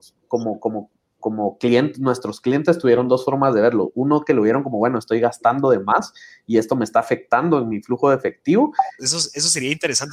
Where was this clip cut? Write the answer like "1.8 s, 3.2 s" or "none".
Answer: 9.0 s